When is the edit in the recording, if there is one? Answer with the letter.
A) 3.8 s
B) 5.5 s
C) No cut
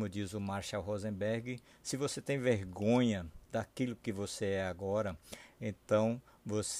C